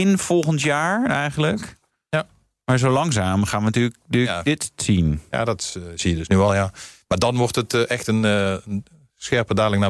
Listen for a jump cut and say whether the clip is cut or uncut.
uncut